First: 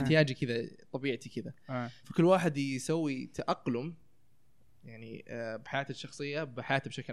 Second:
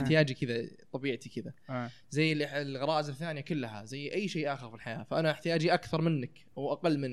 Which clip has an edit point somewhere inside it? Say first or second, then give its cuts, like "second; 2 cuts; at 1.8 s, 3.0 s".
first; 1 cut; at 2.0 s